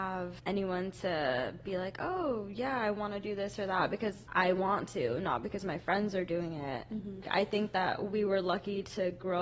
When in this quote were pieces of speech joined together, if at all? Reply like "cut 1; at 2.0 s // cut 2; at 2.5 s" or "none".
none